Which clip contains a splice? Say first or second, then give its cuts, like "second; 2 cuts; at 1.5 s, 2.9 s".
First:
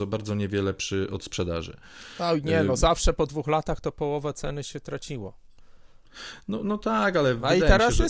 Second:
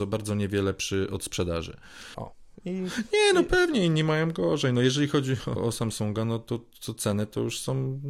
second; 2 cuts; at 2.1 s, 5.6 s